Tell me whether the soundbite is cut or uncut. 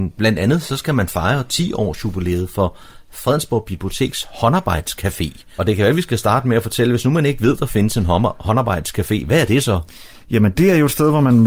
cut